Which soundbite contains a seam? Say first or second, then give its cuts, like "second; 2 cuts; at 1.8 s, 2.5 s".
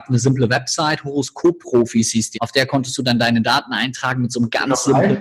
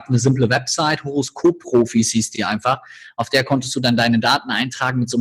first; 1 cut; at 2.3 s